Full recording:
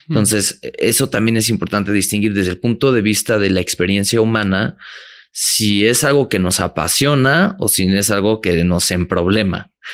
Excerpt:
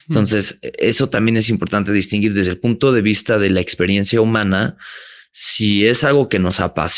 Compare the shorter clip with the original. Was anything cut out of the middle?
no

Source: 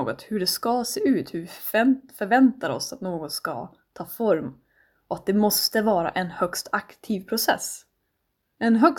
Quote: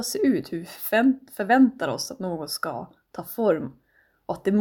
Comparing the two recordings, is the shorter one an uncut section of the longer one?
yes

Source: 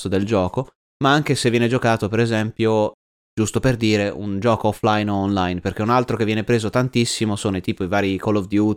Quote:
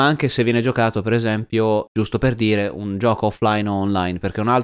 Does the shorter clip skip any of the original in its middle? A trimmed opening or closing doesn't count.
yes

